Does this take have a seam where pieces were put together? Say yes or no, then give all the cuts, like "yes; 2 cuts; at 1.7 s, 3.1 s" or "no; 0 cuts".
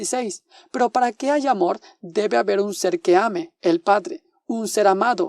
no; 0 cuts